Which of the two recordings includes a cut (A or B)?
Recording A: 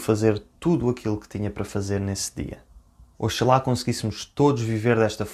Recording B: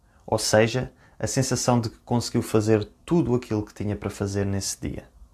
A